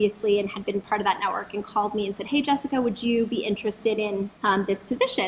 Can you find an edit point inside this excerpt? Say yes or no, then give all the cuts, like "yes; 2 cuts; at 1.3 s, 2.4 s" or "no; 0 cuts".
yes; 1 cut; at 4.4 s